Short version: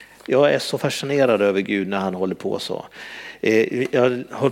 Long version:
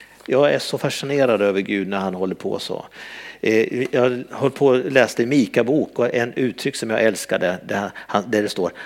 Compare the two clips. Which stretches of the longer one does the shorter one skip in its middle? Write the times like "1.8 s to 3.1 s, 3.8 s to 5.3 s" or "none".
none